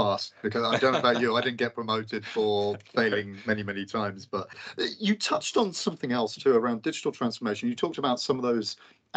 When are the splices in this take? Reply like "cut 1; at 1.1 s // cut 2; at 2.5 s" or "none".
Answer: none